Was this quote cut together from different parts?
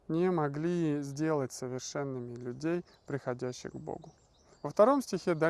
no; 0 cuts

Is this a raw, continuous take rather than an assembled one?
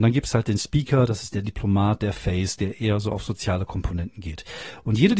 no; 1 cut; at 2.0 s

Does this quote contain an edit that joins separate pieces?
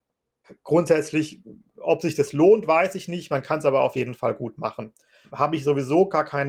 no; 0 cuts

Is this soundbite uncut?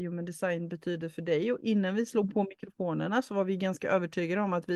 yes; 0 cuts

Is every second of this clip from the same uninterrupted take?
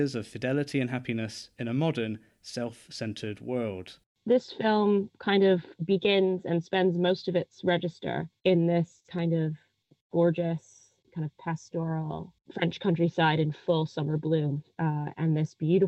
yes; 0 cuts

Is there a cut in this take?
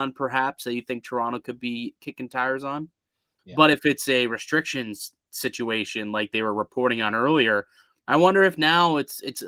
yes; 1 cut; at 3.4 s

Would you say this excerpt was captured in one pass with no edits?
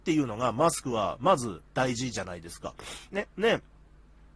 yes; 0 cuts

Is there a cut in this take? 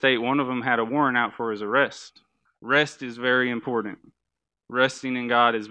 yes; 1 cut; at 2.4 s

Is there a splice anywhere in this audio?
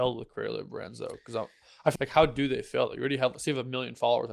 yes; 1 cut; at 2.0 s

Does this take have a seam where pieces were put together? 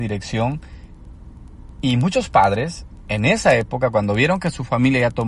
no; 0 cuts

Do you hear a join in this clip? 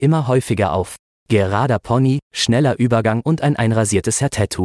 yes; 1 cut; at 2.3 s

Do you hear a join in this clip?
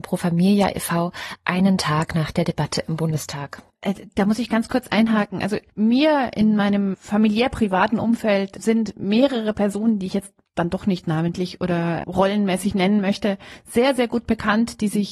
yes; 1 cut; at 5.7 s

